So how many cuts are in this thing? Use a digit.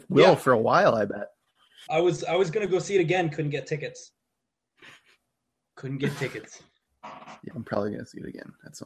2